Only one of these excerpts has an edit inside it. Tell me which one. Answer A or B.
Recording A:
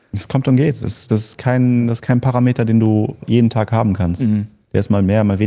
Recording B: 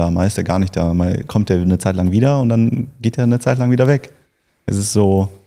A